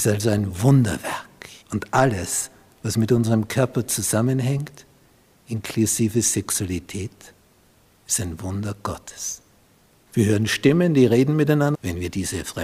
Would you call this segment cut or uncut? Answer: cut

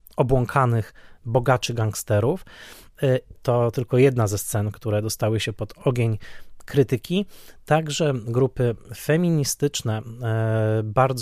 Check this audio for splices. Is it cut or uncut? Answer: cut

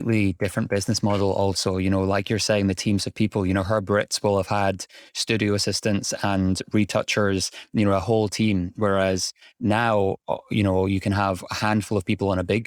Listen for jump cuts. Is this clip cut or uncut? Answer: uncut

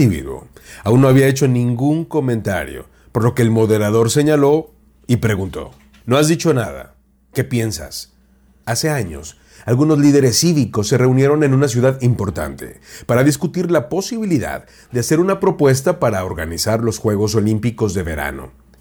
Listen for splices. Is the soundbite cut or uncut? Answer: cut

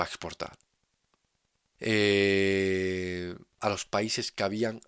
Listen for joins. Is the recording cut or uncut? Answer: cut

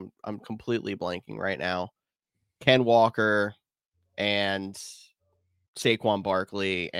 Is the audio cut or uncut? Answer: uncut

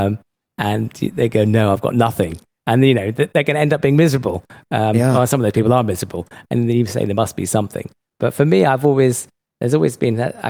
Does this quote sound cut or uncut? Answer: uncut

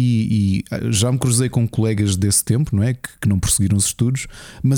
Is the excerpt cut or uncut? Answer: uncut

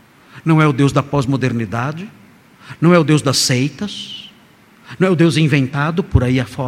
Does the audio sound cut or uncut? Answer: uncut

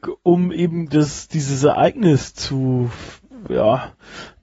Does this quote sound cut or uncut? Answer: uncut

